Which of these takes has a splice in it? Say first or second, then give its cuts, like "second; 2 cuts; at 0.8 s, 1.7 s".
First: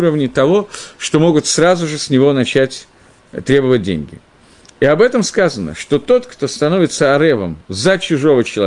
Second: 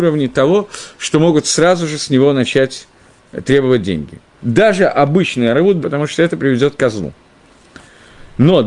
second; 2 cuts; at 4.4 s, 5.8 s